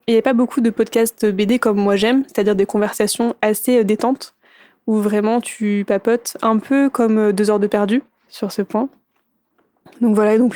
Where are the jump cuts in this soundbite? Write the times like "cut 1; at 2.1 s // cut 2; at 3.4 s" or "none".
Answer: cut 1; at 8.3 s